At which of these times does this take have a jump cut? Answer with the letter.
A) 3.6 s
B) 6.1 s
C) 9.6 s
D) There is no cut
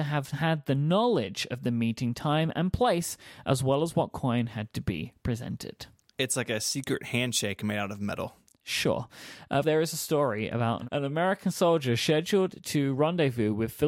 C